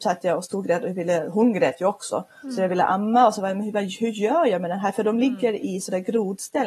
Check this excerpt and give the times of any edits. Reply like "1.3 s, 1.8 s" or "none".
none

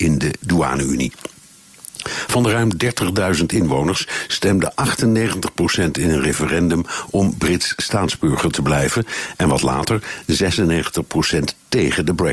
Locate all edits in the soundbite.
none

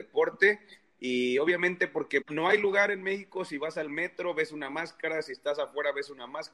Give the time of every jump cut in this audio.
2.2 s

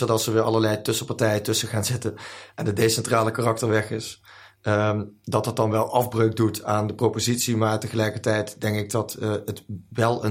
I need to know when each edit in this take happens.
none

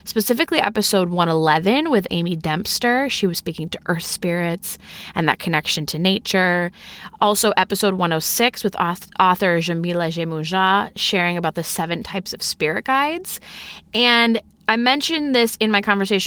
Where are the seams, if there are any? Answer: none

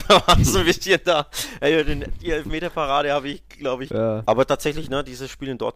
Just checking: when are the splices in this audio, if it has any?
4.2 s

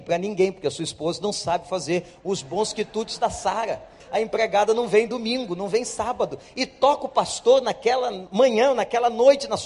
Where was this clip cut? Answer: 4.0 s

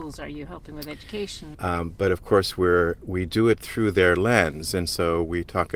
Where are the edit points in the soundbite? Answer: 1.5 s

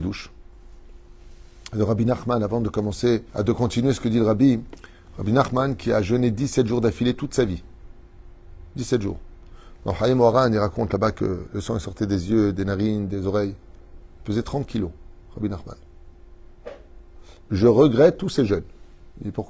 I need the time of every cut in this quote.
3.3 s, 17.5 s

